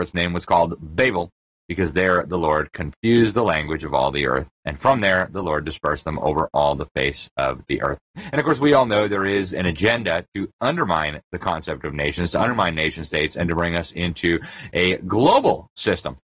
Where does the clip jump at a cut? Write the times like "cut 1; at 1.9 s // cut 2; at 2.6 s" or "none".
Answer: cut 1; at 8.1 s